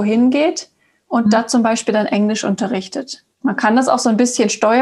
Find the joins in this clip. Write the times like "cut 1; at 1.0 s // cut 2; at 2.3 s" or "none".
cut 1; at 3.3 s